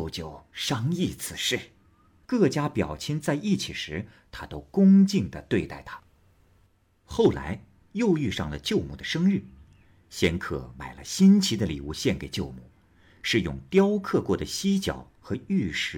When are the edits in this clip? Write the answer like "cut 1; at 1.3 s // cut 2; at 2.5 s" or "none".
cut 1; at 2.2 s